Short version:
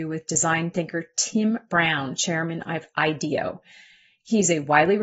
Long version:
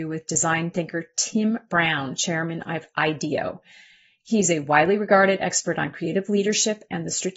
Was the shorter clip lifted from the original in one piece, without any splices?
yes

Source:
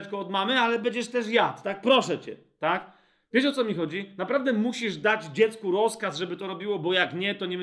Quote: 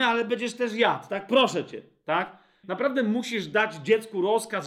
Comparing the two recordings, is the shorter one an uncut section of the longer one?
no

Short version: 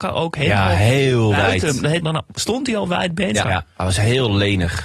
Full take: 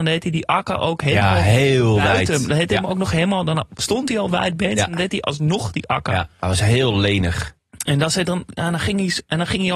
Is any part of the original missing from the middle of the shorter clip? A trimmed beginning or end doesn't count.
yes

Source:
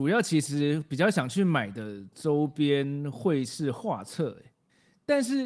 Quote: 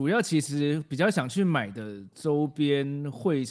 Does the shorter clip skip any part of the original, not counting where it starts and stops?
no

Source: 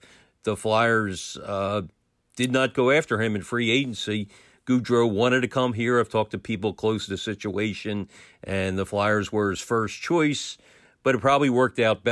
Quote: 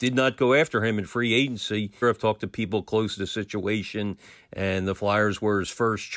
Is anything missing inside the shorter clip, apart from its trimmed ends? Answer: yes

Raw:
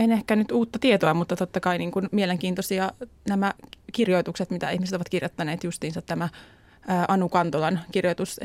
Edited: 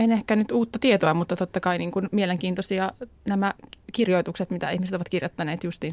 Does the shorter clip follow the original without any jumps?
yes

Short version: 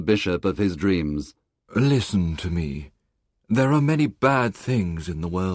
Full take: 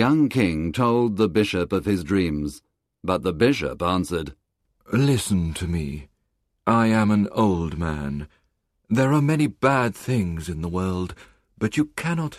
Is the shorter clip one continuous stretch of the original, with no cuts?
no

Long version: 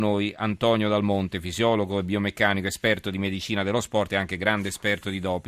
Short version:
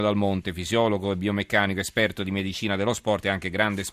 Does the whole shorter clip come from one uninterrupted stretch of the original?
yes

